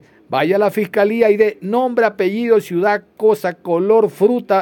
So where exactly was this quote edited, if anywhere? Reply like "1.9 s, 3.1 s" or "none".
none